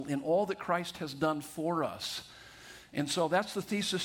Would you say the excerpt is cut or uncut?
uncut